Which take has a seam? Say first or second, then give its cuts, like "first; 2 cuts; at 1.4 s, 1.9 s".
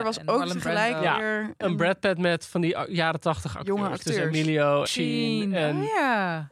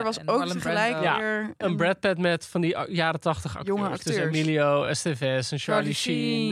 first; 1 cut; at 4.9 s